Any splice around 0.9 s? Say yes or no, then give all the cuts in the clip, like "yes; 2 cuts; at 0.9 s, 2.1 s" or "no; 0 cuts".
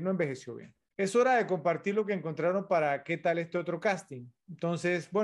yes; 1 cut; at 0.9 s